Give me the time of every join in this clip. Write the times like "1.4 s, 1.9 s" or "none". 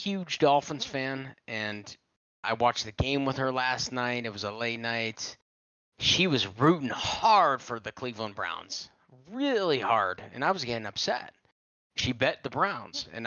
none